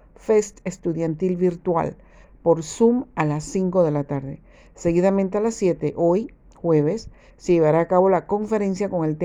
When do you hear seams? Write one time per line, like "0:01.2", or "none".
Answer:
none